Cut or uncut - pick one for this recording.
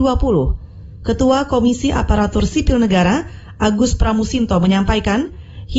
uncut